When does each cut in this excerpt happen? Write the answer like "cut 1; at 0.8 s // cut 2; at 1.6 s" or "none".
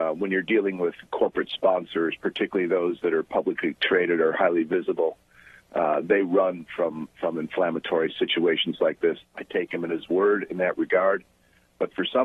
cut 1; at 9.2 s